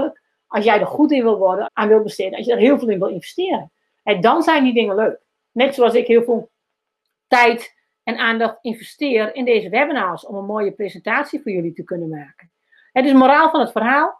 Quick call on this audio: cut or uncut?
cut